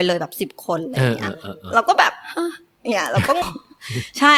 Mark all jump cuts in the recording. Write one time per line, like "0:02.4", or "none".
0:03.4